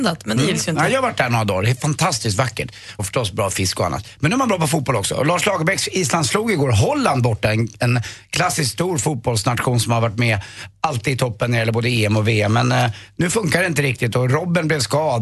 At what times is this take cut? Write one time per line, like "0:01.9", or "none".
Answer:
0:03.0